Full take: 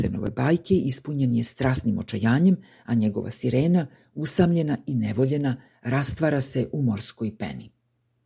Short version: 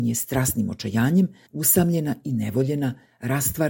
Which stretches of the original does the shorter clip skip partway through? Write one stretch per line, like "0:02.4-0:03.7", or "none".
0:02.7-0:04.1